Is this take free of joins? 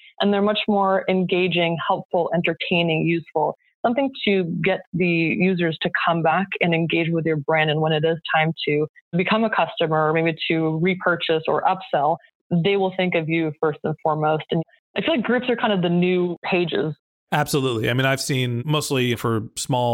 yes; 0 cuts

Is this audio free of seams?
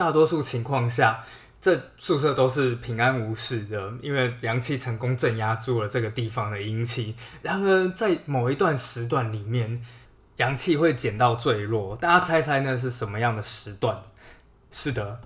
yes; 0 cuts

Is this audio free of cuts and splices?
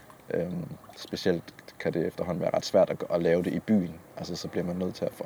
yes; 0 cuts

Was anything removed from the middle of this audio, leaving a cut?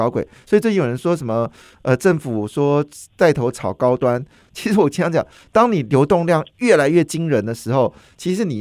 no; 0 cuts

